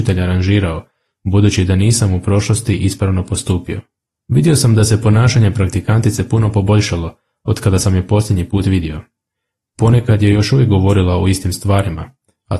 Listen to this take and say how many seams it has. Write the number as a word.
one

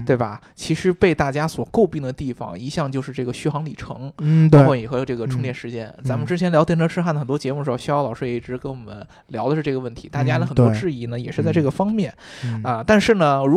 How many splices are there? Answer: zero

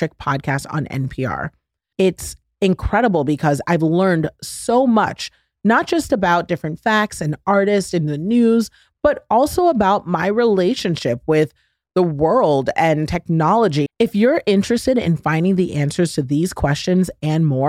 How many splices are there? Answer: two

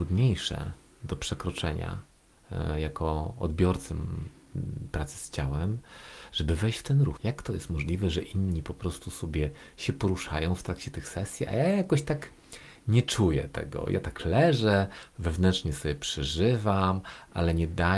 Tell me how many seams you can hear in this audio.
one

